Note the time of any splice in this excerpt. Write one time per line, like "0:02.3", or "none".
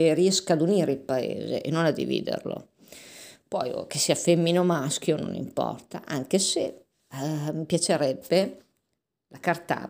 none